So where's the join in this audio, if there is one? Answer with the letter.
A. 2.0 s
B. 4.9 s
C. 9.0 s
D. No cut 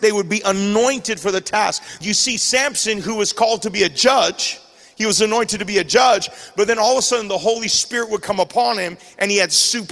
A